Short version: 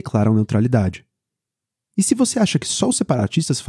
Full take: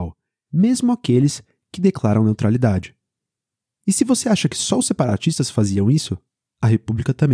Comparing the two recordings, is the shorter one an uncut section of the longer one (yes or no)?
yes